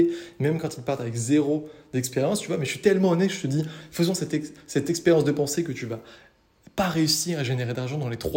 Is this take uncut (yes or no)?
yes